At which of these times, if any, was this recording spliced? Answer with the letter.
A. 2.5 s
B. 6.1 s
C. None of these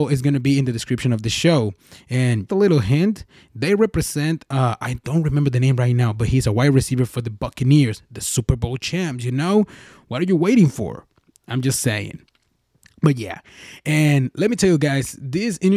A